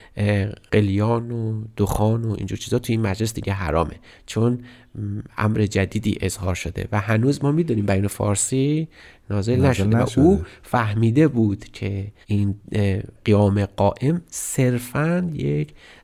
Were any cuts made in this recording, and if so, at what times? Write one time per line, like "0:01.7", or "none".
0:12.2